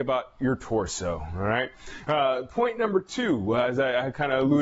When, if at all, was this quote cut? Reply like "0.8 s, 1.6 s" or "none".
none

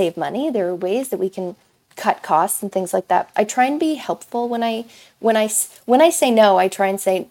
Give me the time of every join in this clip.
3.3 s

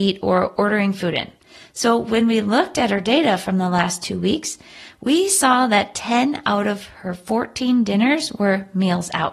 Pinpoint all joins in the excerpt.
none

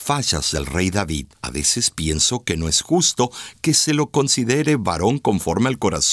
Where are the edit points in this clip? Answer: 1.3 s

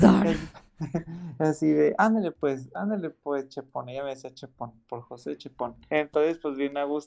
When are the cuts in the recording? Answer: 5.9 s

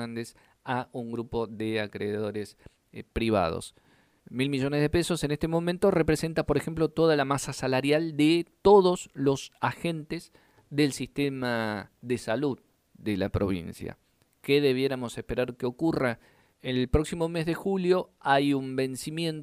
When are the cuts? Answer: 4.2 s, 16.5 s

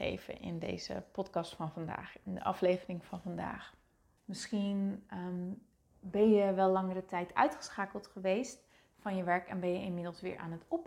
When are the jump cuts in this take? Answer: 4.2 s

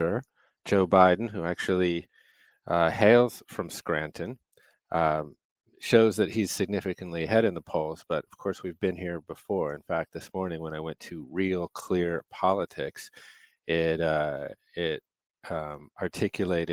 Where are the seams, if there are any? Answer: none

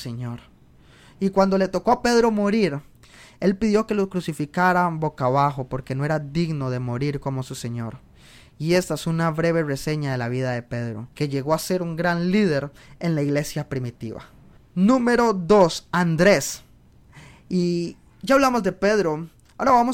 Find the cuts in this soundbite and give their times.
11.1 s, 14.6 s

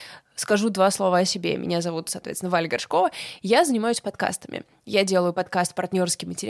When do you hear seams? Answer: none

